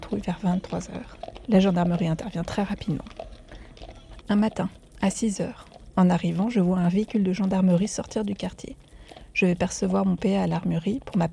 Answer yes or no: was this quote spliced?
yes